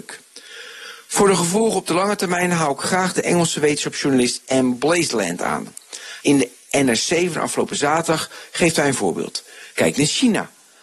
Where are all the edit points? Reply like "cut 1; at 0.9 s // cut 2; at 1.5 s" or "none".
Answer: cut 1; at 6.2 s // cut 2; at 9.7 s